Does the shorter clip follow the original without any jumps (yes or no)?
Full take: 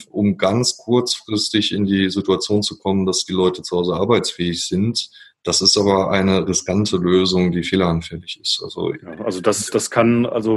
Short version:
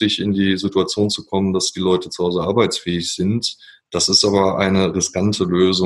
yes